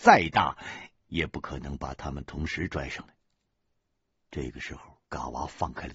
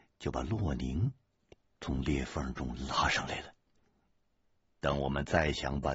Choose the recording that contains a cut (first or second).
first